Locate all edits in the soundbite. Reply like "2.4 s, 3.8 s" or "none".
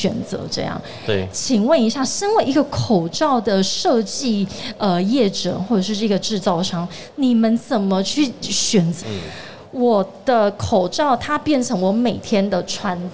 9.0 s